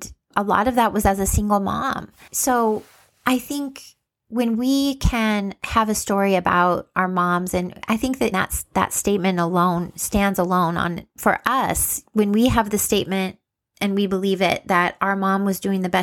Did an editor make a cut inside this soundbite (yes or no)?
yes